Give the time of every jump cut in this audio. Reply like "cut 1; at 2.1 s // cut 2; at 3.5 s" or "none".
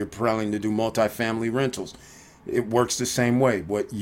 none